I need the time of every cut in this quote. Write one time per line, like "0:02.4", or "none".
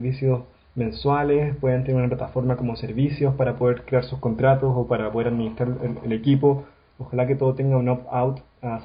0:06.9